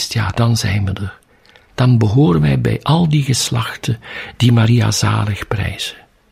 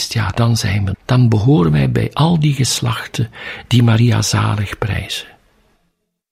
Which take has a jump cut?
second; 1 cut; at 0.9 s

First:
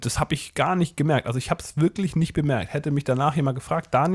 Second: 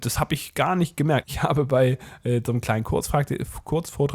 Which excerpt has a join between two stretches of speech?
second; 1 cut; at 1.2 s

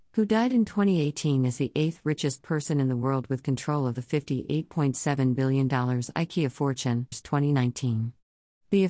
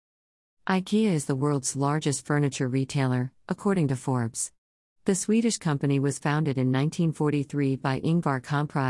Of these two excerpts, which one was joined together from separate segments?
first; 1 cut; at 7.1 s

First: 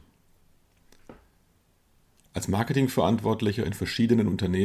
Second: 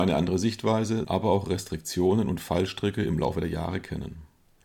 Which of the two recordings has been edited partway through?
second; 1 cut; at 1.0 s

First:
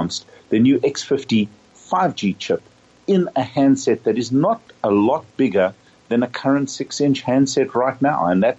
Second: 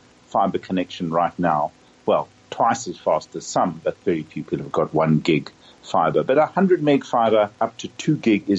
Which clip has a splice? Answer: second; 1 cut; at 7.5 s

